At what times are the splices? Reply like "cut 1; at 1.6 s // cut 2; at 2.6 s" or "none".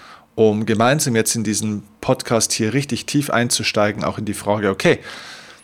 none